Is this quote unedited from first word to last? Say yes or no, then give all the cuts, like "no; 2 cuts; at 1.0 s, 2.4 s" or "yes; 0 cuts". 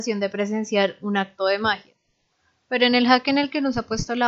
yes; 0 cuts